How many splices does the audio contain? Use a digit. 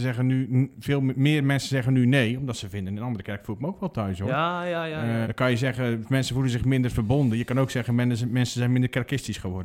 1